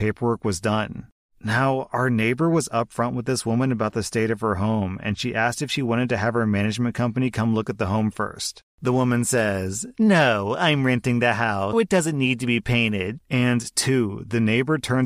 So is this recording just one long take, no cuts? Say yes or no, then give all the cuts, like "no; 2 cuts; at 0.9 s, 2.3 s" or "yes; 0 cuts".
no; 2 cuts; at 11.7 s, 13.2 s